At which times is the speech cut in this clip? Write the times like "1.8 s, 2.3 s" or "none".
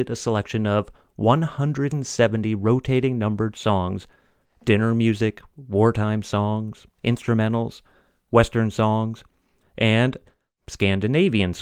4.4 s, 9.6 s